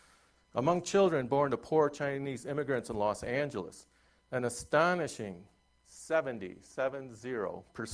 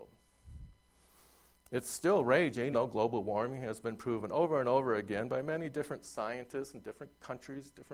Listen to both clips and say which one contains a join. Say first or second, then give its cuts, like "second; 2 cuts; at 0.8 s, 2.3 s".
second; 2 cuts; at 1.6 s, 2.7 s